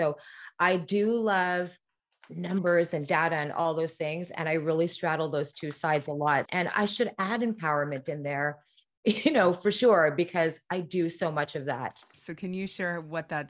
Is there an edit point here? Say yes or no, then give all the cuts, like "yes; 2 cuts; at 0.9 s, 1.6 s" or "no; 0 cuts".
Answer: yes; 2 cuts; at 6.5 s, 12.1 s